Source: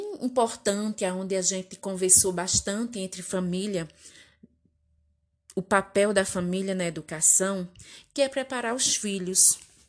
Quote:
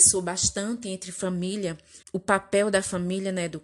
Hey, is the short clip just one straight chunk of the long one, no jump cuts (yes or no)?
no